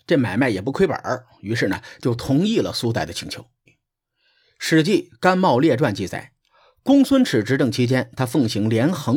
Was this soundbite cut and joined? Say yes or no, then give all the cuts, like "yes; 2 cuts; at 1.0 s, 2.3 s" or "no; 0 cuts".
yes; 1 cut; at 3.7 s